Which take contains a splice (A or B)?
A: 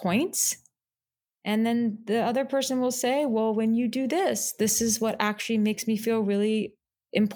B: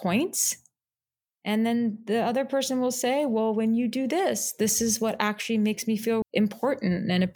B